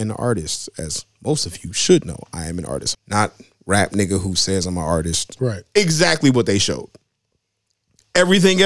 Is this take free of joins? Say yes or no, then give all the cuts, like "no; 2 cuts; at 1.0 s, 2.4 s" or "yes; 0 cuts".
no; 2 cuts; at 2.9 s, 5.4 s